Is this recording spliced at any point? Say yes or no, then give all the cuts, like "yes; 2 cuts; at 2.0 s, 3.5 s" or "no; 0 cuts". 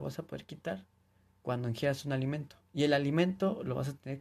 yes; 1 cut; at 2.6 s